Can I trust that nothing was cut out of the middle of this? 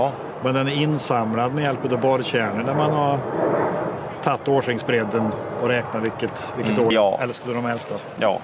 no; 1 cut; at 6.9 s

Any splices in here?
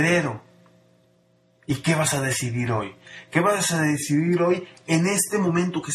no; 0 cuts

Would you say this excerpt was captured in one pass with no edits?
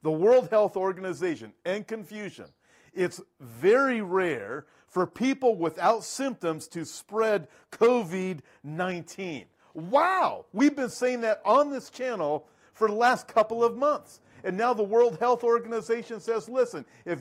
yes; 0 cuts

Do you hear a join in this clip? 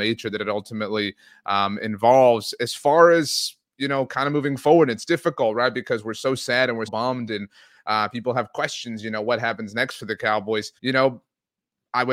yes; 2 cuts; at 6.9 s, 10.8 s

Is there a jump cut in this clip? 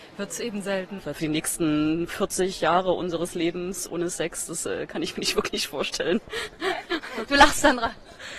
yes; 1 cut; at 1.0 s

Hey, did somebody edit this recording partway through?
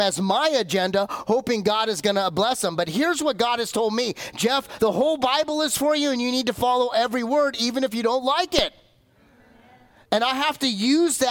no; 0 cuts

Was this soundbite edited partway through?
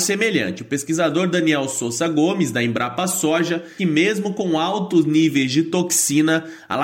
yes; 1 cut; at 3.8 s

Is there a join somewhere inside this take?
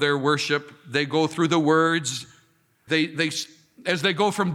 yes; 1 cut; at 2.9 s

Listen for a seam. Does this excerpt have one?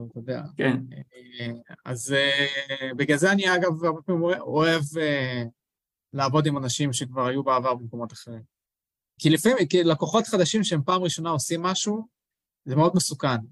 yes; 1 cut; at 9.2 s

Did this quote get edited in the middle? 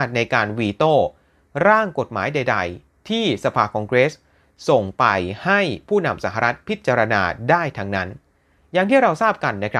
no; 0 cuts

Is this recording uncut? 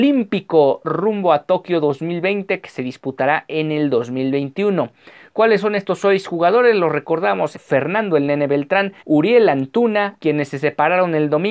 no; 3 cuts; at 7.5 s, 9.0 s, 10.2 s

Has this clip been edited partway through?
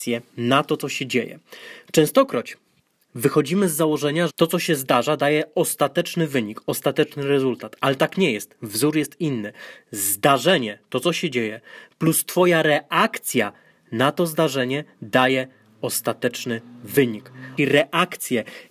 yes; 2 cuts; at 4.3 s, 17.6 s

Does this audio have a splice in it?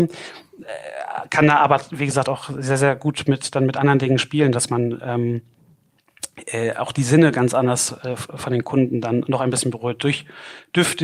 no; 0 cuts

